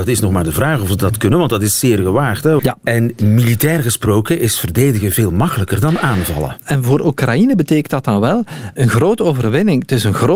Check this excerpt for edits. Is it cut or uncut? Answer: cut